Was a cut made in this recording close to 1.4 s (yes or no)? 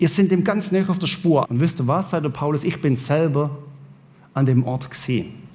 yes